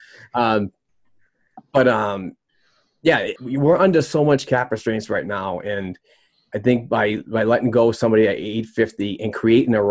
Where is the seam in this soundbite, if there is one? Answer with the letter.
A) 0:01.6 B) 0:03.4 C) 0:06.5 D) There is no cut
B